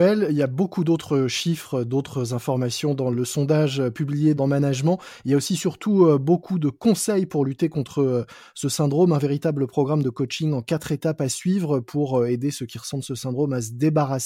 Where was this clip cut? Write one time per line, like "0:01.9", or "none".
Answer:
0:03.1
0:04.4